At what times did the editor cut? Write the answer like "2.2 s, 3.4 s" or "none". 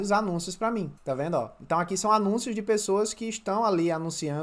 1.0 s